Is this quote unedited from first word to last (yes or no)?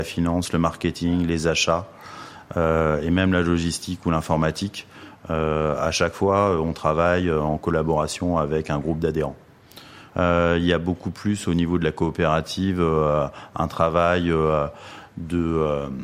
no